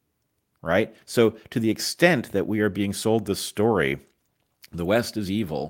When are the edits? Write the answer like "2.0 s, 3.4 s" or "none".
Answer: none